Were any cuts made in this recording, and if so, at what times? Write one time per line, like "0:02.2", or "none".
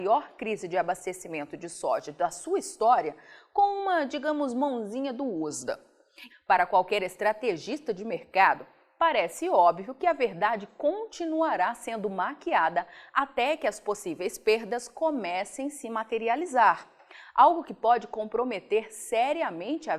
0:06.3